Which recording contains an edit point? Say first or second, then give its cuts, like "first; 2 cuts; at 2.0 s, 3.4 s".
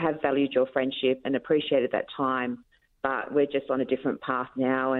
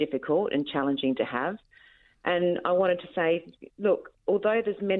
first; 1 cut; at 1.2 s